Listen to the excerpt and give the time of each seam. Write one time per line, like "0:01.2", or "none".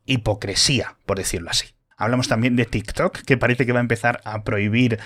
0:01.9